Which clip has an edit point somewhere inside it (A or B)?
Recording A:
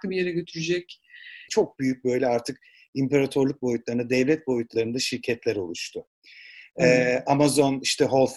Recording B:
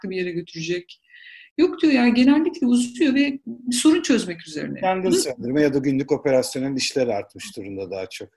A